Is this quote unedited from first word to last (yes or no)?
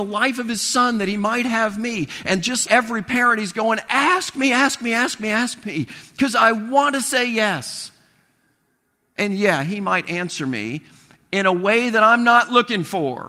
no